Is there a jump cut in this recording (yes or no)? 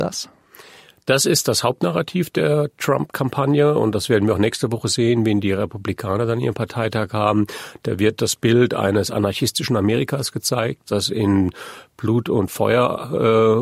no